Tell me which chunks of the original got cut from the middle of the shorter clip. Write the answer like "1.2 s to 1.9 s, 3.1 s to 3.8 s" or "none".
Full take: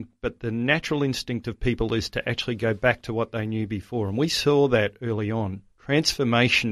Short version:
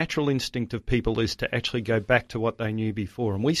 none